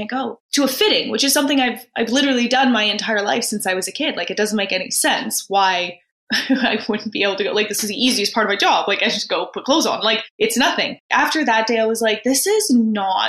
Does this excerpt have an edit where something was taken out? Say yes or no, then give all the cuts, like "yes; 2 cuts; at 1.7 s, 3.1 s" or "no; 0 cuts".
no; 0 cuts